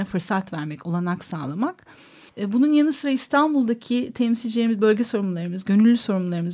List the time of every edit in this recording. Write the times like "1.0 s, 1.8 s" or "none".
2.3 s